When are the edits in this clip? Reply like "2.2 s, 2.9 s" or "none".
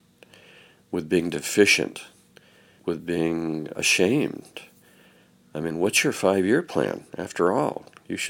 none